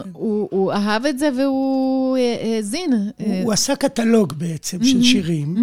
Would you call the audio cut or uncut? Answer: uncut